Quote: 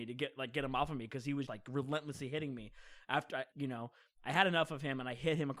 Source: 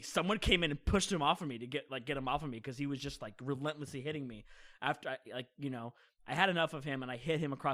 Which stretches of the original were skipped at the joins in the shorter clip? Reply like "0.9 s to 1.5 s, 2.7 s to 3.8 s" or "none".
3.0 s to 3.2 s, 5.2 s to 5.5 s